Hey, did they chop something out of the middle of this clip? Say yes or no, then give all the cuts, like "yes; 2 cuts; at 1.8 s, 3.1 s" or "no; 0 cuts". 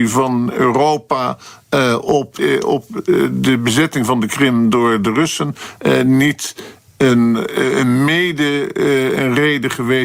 yes; 1 cut; at 2.4 s